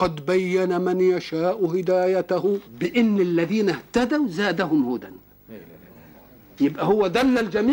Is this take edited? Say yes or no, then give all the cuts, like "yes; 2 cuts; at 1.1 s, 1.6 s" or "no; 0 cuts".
yes; 1 cut; at 2.6 s